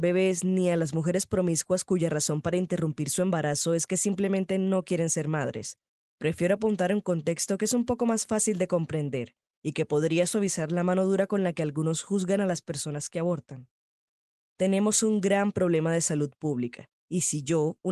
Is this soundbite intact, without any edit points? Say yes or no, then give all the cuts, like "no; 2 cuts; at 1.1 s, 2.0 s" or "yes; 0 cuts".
no; 1 cut; at 14.4 s